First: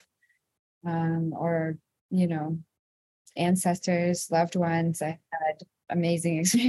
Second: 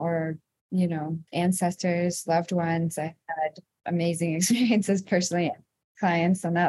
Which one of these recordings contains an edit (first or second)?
second